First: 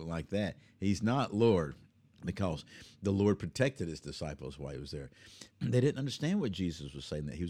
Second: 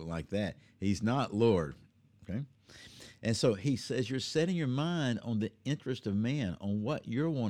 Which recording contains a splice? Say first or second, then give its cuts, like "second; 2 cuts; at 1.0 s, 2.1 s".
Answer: first; 2 cuts; at 2.1 s, 5.5 s